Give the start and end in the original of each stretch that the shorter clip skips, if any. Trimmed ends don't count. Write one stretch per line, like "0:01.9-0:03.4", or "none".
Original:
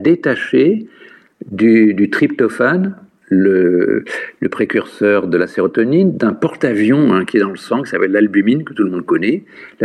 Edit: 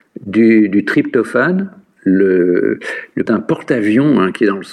0:04.5-0:06.2

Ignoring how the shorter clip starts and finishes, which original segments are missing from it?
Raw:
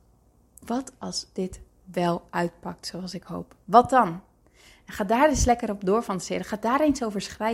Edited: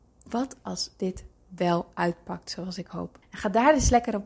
0:03.6-0:04.8

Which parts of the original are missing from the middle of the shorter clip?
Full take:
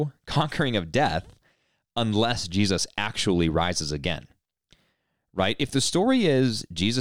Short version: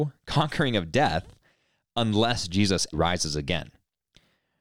0:02.9-0:03.5

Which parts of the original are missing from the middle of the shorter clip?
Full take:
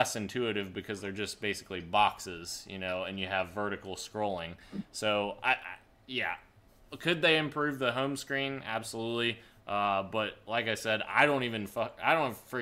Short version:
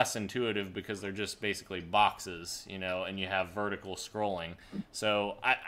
none

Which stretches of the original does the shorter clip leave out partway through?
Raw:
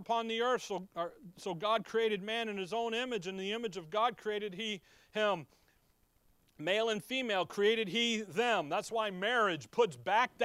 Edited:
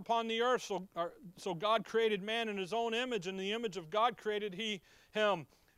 none

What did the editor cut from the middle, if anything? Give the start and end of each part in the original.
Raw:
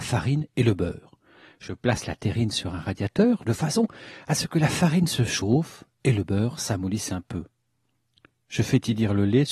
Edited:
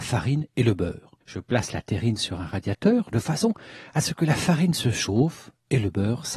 0:01.2-0:01.5

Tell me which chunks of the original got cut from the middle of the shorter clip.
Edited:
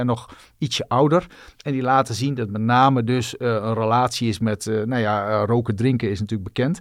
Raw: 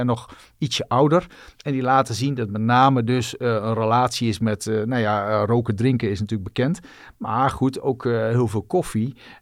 none

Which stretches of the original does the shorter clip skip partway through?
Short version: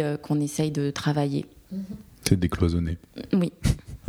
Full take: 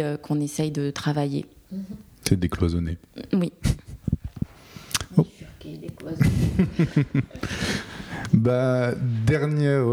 none

